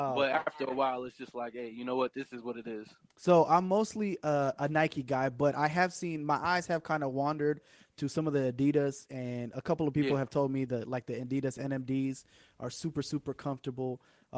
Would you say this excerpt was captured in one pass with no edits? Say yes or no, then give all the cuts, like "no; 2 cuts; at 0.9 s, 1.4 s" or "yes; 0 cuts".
yes; 0 cuts